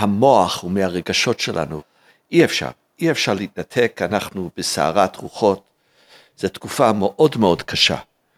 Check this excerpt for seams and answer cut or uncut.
uncut